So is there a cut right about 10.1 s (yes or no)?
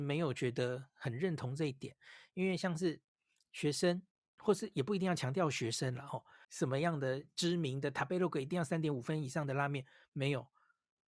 no